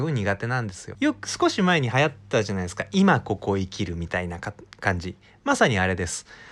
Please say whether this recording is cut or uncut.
cut